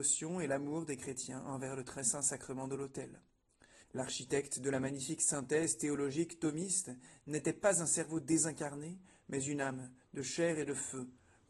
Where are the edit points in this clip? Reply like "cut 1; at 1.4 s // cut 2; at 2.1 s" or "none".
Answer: cut 1; at 3.8 s